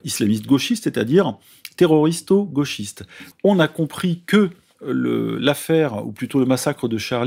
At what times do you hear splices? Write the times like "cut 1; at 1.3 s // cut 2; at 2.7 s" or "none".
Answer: cut 1; at 3.3 s